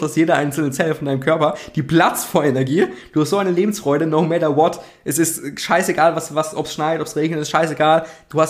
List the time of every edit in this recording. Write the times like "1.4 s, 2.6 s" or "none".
none